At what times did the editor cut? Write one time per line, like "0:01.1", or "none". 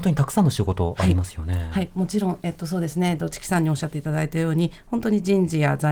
none

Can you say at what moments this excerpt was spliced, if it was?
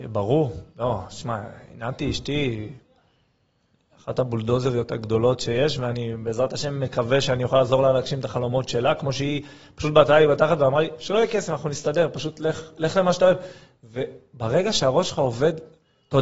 none

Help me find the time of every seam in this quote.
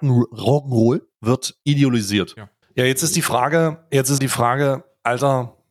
0:02.6
0:04.2

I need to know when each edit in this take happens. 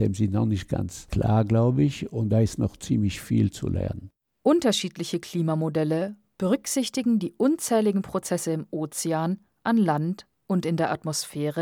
none

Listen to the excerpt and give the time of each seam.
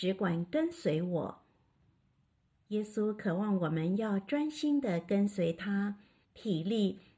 0:06.2

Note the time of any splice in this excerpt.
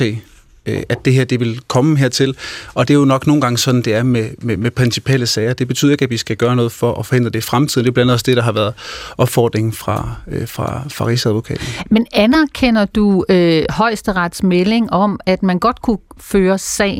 none

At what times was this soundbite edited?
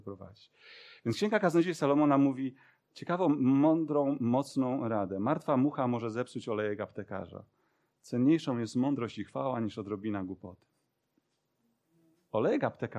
none

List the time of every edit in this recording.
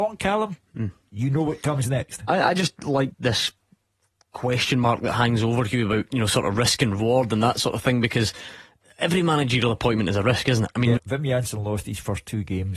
0:03.1
0:11.0

